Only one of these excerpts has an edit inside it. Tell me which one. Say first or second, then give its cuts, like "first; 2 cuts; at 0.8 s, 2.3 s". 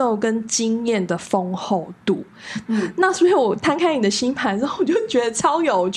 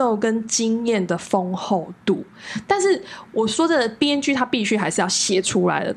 first; 1 cut; at 2.7 s